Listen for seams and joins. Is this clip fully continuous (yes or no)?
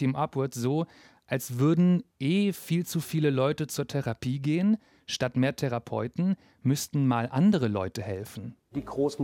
yes